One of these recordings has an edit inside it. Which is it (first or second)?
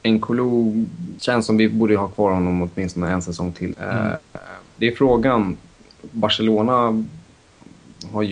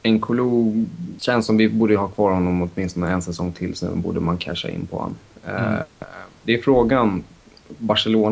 first